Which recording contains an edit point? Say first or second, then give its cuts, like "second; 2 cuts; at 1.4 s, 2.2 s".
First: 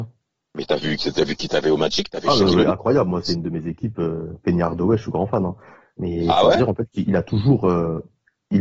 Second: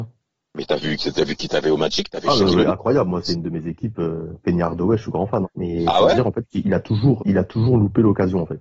second; 2 cuts; at 5.4 s, 7.2 s